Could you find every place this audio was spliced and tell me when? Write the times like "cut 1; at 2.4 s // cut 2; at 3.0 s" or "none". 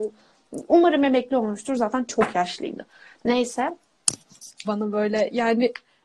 cut 1; at 4.6 s